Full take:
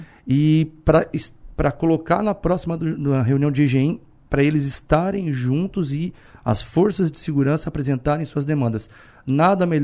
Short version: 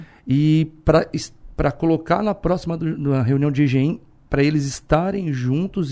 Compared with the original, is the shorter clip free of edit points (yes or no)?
yes